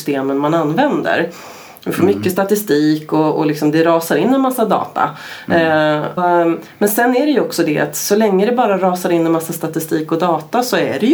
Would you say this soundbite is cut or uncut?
cut